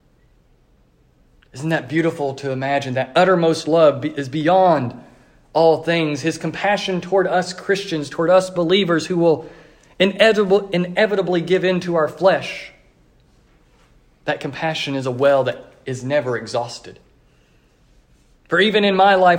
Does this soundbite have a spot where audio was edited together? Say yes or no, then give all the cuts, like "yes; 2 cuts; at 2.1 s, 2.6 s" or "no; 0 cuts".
no; 0 cuts